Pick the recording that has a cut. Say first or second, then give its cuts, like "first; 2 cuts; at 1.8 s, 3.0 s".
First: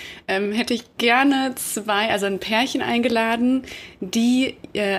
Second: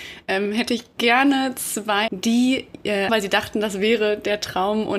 second; 2 cuts; at 2.1 s, 3.1 s